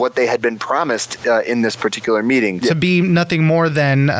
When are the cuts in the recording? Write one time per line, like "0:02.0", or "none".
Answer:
0:02.6